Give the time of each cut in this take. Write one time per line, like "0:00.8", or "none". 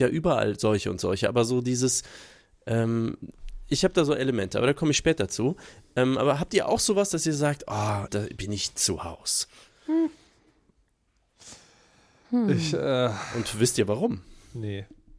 0:08.1